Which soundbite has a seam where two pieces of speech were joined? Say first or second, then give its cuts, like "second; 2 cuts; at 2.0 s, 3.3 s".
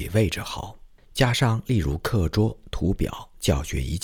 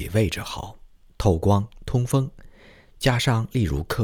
first; 1 cut; at 1.0 s